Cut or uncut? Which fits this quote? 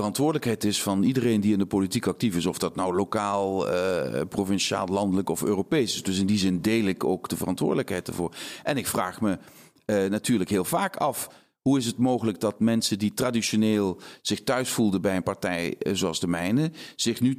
uncut